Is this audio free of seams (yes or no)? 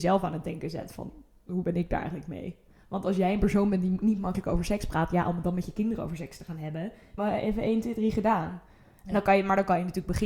no